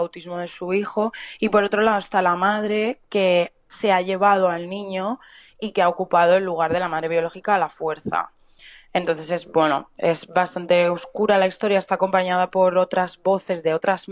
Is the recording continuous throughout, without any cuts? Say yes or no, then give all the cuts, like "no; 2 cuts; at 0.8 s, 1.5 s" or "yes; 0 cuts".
yes; 0 cuts